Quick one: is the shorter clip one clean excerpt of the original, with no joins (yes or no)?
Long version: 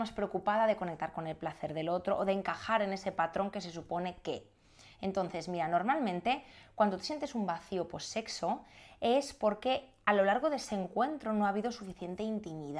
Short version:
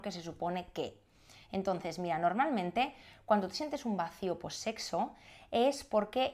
yes